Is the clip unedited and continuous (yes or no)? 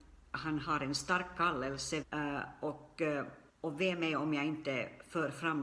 no